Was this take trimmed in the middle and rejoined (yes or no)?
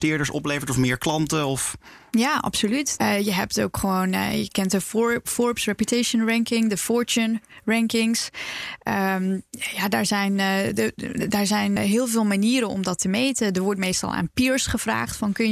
yes